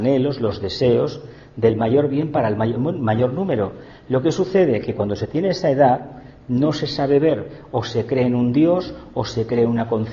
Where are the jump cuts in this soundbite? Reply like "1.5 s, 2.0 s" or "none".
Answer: 2.8 s